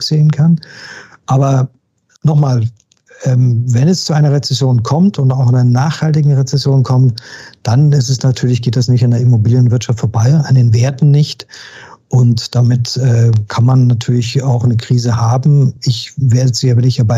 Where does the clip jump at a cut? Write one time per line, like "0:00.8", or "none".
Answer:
none